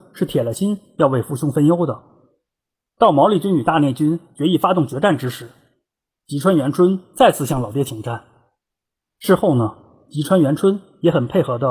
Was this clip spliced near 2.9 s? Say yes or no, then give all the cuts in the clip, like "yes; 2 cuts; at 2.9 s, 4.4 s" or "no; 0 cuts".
no; 1 cut; at 9.1 s